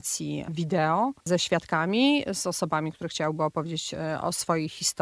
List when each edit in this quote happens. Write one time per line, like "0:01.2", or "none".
0:01.2